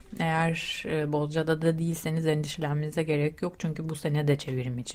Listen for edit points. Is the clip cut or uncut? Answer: uncut